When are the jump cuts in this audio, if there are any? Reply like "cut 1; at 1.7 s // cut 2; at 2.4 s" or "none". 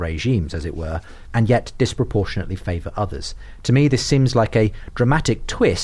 cut 1; at 1.3 s

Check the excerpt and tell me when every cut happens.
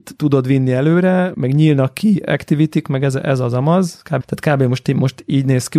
cut 1; at 1.3 s // cut 2; at 4.2 s

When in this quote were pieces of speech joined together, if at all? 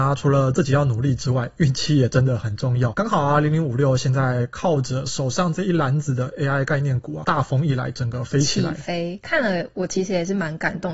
none

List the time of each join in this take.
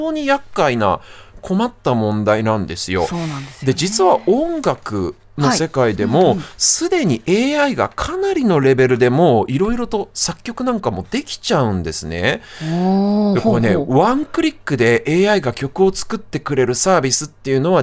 none

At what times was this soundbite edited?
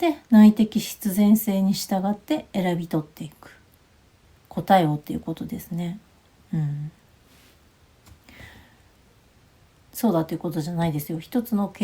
cut 1; at 9.8 s

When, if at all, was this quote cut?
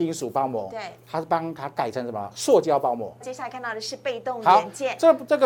cut 1; at 3.2 s

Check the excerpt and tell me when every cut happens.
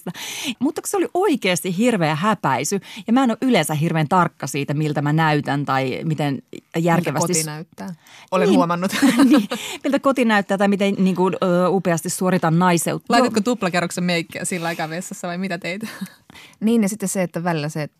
cut 1; at 13.1 s // cut 2; at 16.5 s

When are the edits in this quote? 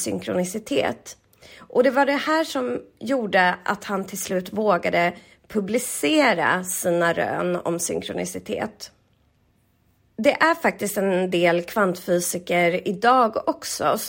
none

